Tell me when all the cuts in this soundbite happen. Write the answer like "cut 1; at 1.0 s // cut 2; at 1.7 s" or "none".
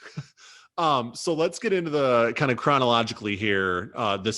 none